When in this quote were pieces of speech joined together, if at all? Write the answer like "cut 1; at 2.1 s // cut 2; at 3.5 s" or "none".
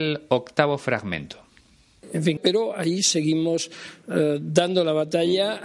cut 1; at 2.4 s